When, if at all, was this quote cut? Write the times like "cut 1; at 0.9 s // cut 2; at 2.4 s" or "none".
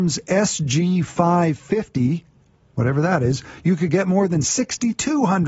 none